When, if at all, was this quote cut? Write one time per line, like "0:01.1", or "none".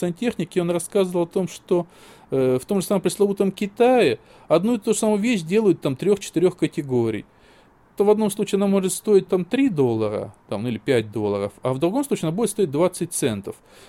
0:08.0
0:09.3